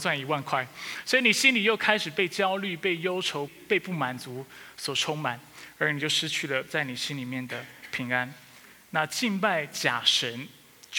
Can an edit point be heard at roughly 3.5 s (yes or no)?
yes